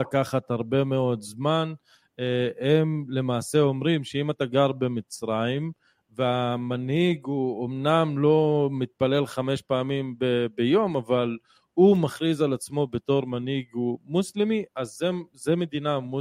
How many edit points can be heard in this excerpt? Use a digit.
0